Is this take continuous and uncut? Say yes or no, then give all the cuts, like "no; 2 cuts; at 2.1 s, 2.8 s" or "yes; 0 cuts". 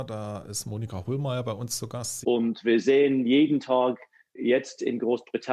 no; 1 cut; at 2.2 s